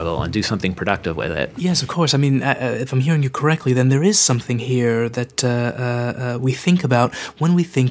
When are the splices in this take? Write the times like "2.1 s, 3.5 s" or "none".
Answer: none